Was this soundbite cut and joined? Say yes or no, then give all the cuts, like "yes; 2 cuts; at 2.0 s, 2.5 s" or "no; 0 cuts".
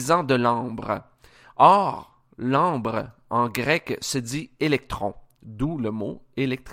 no; 0 cuts